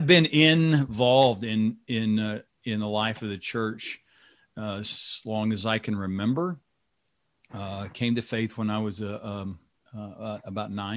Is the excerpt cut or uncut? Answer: uncut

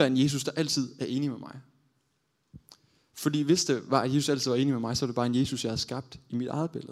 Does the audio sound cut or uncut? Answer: uncut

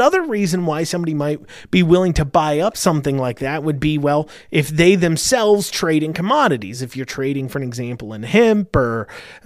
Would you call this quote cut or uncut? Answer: uncut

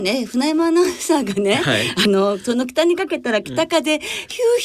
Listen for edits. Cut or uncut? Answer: uncut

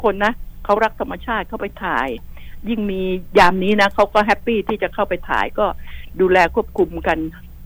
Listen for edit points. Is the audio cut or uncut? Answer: uncut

